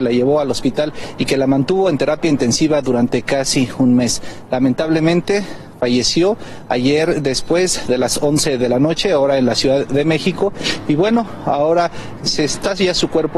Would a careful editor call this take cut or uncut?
uncut